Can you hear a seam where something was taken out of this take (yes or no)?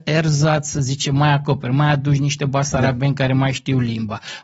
no